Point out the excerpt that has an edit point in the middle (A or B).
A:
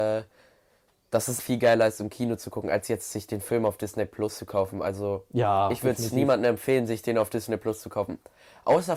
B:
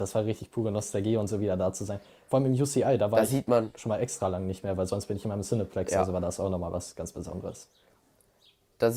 A